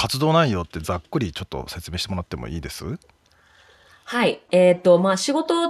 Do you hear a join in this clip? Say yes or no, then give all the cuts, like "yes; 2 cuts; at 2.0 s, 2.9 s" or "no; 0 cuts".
no; 0 cuts